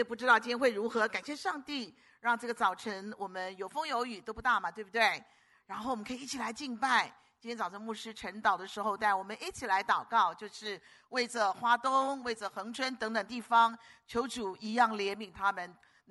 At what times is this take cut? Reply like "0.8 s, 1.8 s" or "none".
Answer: none